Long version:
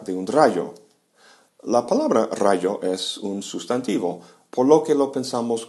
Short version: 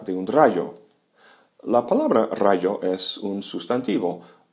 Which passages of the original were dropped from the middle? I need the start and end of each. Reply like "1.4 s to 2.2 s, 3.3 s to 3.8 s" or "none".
none